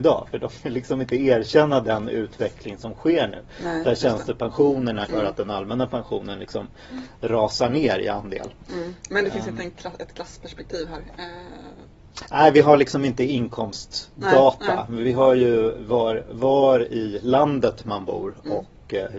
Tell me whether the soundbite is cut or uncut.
cut